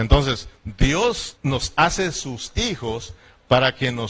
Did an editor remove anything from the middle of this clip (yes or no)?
yes